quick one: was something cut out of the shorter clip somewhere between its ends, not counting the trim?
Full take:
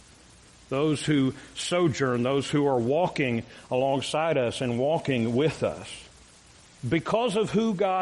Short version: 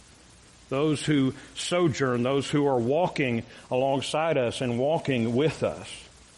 no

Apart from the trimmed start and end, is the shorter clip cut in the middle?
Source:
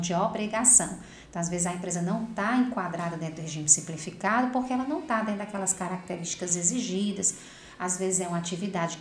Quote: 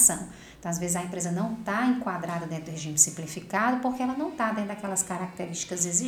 no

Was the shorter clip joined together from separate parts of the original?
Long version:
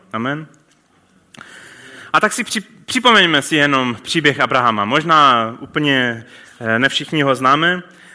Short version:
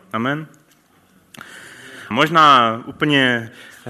yes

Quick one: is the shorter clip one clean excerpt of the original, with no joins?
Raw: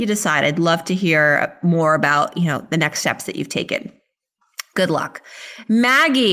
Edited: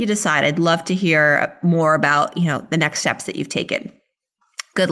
yes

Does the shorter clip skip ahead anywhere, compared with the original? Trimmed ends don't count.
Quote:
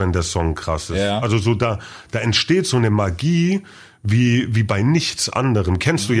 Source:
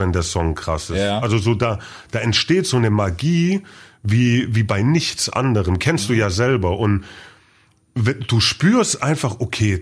no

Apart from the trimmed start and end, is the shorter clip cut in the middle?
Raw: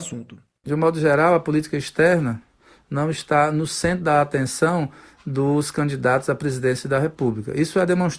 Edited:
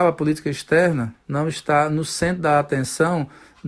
yes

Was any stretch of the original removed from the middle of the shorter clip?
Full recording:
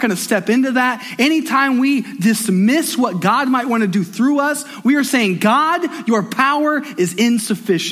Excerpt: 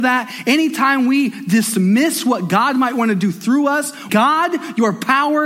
yes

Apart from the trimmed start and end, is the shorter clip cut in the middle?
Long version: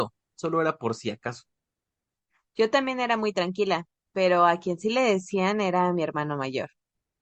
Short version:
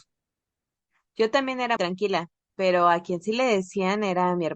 yes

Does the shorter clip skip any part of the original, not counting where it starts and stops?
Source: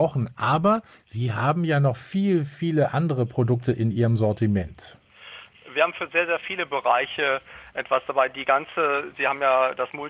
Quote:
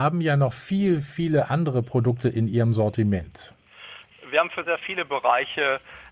yes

